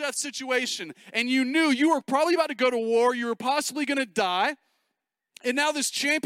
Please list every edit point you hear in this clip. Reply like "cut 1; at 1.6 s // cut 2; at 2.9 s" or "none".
none